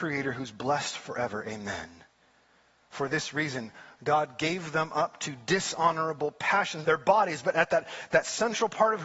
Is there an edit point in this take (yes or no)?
yes